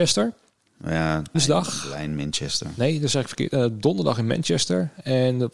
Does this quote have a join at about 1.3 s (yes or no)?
yes